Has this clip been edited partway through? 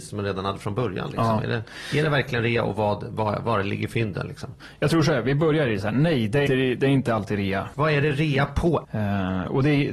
yes; 3 cuts; at 6.5 s, 7.7 s, 8.8 s

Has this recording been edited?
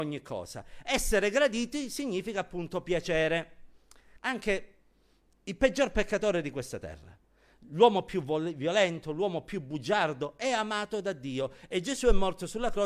yes; 1 cut; at 4.2 s

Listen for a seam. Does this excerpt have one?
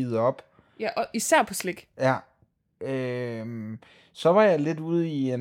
no; 0 cuts

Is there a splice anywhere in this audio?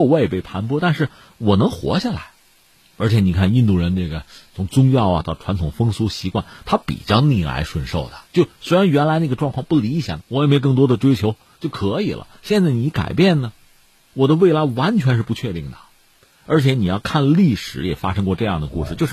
yes; 2 cuts; at 8.3 s, 10.2 s

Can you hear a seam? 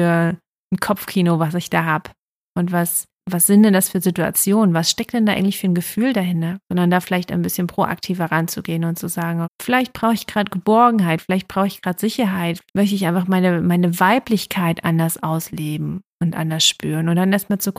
yes; 3 cuts; at 6.6 s, 9.4 s, 12.7 s

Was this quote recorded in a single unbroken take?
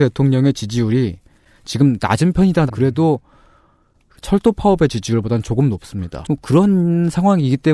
no; 2 cuts; at 2.7 s, 6.2 s

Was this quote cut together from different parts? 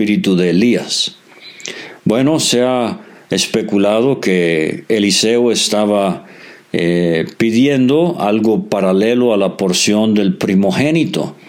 no; 0 cuts

